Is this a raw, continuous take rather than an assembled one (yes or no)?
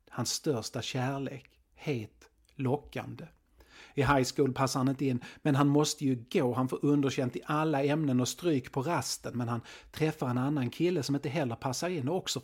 no